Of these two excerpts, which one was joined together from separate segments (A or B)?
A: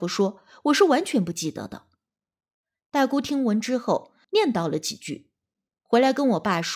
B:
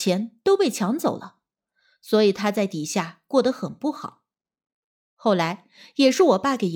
A